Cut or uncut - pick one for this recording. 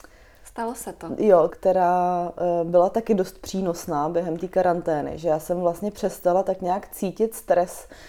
cut